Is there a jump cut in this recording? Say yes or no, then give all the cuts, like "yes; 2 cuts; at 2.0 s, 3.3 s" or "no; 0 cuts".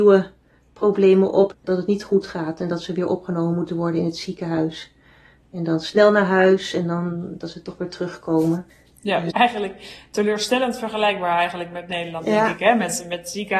yes; 1 cut; at 9.3 s